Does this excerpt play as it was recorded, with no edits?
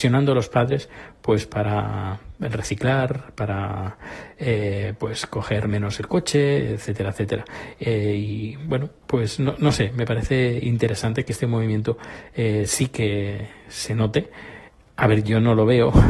yes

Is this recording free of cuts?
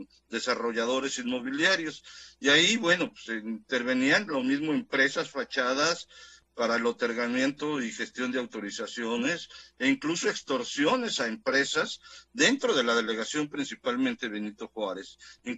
yes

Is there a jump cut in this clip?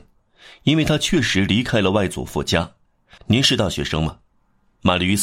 yes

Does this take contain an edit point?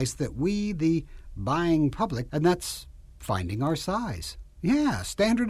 yes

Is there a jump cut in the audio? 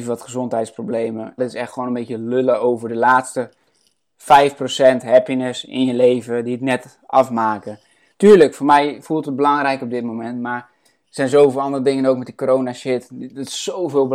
yes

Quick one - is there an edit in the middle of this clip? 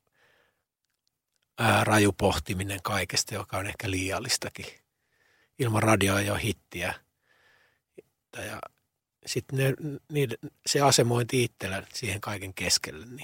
yes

